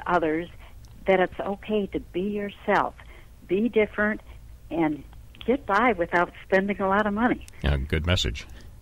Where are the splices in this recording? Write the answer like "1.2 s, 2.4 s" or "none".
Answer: none